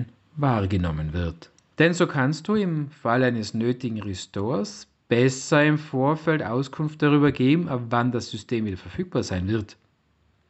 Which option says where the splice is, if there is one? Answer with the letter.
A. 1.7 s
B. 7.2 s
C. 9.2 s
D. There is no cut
A